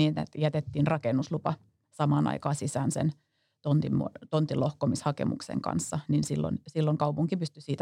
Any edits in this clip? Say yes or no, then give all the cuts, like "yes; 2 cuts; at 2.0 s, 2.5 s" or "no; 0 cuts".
no; 0 cuts